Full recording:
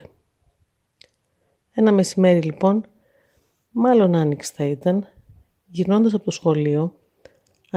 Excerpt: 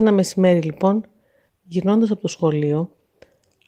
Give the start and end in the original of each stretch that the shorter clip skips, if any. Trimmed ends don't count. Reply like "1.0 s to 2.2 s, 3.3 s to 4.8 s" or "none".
3.3 s to 5.5 s